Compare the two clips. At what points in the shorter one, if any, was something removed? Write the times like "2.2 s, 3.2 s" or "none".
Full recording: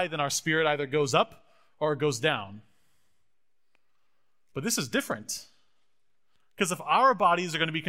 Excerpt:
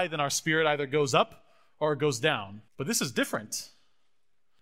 2.7 s